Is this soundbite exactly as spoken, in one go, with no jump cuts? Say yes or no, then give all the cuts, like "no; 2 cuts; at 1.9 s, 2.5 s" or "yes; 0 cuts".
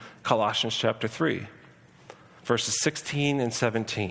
no; 1 cut; at 2.4 s